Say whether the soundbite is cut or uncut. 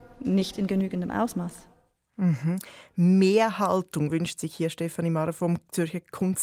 uncut